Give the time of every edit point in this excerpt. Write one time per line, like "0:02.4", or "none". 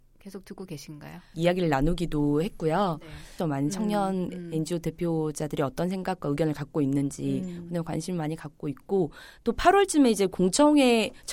0:01.3
0:03.4